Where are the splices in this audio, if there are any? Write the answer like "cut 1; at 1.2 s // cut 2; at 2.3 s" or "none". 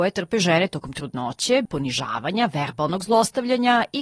cut 1; at 1.7 s